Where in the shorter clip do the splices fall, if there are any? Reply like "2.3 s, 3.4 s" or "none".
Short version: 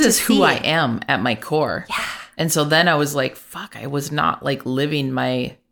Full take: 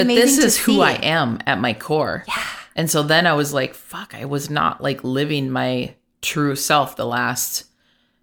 none